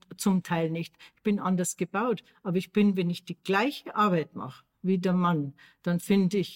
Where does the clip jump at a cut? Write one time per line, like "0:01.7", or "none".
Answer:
none